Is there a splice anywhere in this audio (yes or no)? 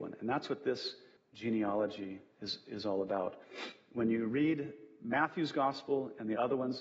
yes